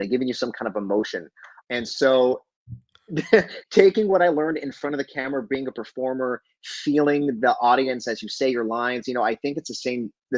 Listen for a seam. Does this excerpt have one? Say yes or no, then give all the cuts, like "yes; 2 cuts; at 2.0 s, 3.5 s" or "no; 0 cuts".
yes; 1 cut; at 1.6 s